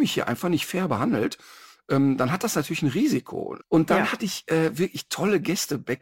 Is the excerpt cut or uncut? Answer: cut